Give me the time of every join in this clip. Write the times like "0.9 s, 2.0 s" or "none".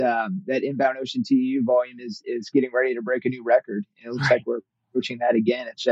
none

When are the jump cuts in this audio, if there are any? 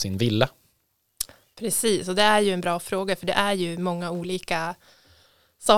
none

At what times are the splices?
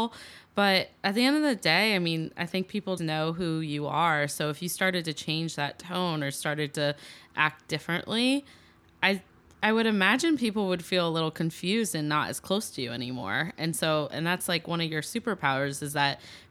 3.0 s

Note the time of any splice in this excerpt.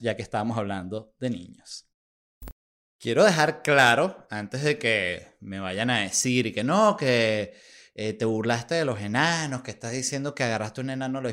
none

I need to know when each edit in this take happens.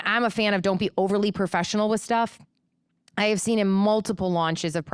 none

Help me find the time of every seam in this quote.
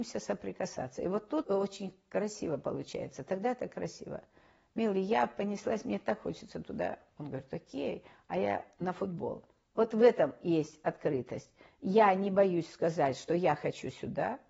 1.4 s

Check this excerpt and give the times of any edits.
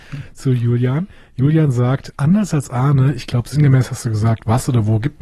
2.1 s

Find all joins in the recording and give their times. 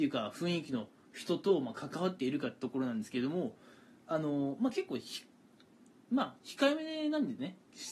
none

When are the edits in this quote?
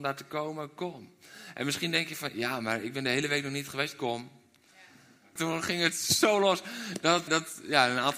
5.4 s, 7.3 s

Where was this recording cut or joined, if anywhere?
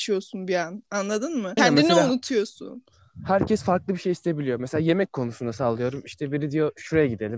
1.6 s

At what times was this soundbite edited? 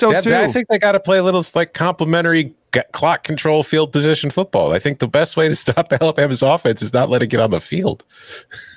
2.6 s

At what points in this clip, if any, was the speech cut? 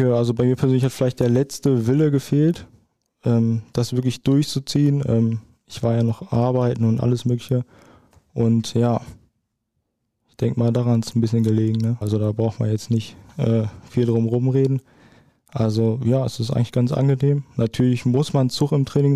12.0 s

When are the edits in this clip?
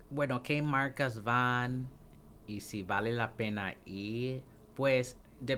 none

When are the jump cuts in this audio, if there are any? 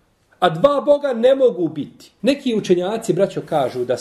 2.2 s

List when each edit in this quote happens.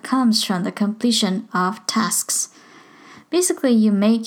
none

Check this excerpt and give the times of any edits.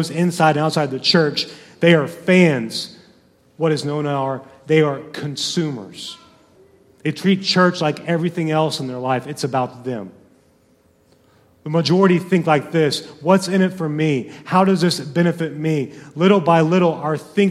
none

